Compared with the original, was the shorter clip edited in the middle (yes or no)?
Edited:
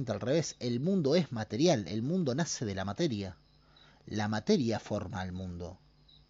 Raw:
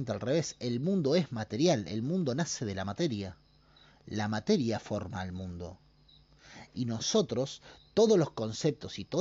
no